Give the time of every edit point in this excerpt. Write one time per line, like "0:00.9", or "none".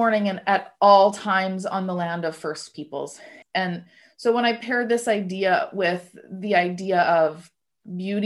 0:03.4